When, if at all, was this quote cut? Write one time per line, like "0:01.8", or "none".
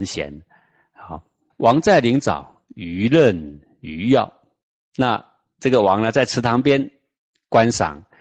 0:01.5